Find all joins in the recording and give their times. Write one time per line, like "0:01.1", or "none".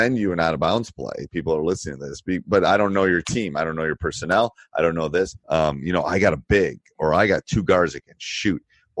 0:05.4